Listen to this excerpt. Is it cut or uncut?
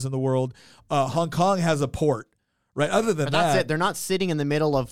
uncut